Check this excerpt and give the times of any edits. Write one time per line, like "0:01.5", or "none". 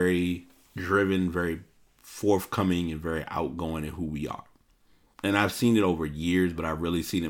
0:05.1